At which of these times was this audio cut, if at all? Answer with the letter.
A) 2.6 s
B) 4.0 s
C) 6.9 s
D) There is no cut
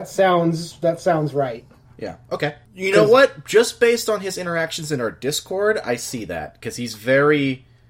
A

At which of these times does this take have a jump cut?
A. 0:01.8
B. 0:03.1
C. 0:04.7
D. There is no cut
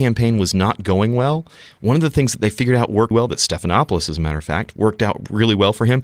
B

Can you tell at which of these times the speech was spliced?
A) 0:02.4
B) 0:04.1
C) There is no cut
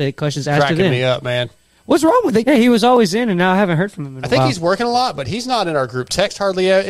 A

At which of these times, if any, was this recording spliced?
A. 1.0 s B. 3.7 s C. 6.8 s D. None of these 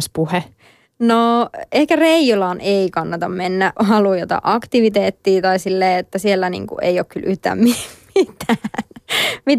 B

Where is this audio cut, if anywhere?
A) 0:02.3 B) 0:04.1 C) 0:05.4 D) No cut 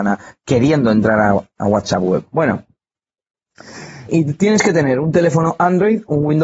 B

